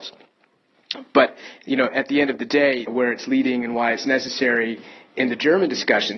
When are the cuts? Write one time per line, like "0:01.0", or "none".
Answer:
0:02.9